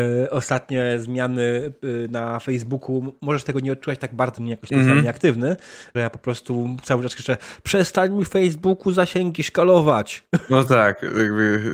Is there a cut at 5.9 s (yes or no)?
yes